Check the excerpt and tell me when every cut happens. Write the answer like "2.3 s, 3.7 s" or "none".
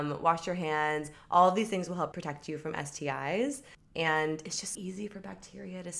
2.1 s, 4.7 s